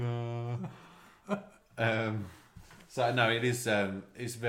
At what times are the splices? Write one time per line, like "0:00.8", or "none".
none